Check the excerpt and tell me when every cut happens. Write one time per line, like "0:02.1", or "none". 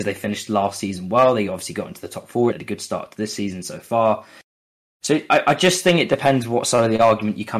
0:02.5